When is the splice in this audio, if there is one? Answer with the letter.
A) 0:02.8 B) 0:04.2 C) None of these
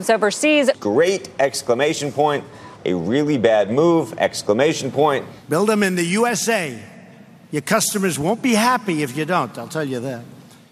A